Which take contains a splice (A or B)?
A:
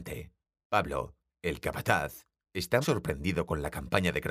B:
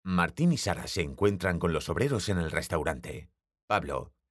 A